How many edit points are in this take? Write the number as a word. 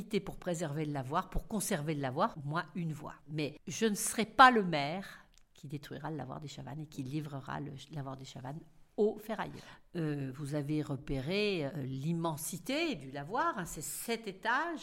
one